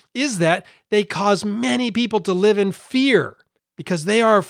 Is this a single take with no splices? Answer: no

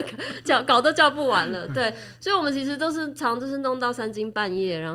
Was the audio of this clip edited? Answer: no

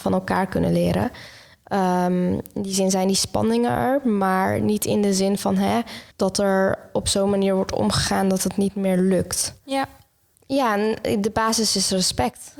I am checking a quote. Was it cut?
yes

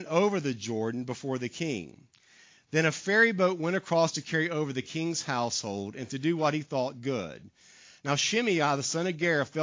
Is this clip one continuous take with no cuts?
yes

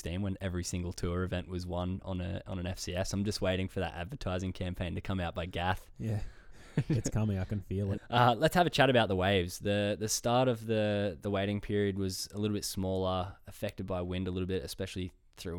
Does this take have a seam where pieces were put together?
yes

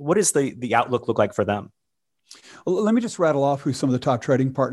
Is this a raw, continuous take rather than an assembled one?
yes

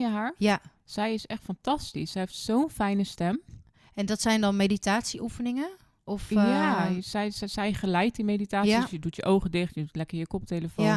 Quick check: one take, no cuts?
yes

